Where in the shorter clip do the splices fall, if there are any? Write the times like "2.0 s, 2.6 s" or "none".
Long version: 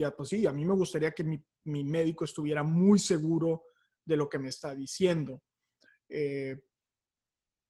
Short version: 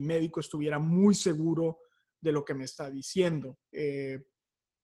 3.7 s